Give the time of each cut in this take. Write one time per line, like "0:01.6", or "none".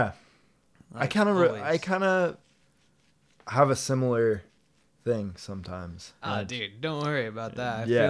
0:06.2